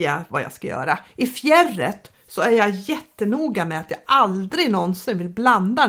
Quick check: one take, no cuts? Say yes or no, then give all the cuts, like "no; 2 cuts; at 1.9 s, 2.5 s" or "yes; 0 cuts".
yes; 0 cuts